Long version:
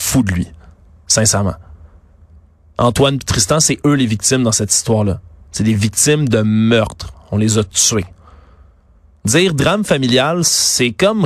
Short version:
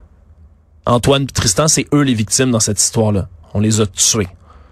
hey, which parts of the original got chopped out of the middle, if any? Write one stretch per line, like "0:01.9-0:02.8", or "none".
0:05.4-0:07.2